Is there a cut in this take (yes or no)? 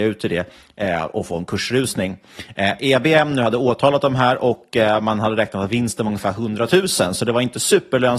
no